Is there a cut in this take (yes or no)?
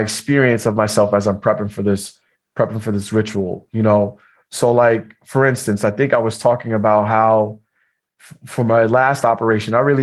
no